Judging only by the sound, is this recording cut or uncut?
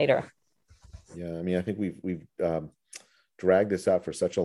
uncut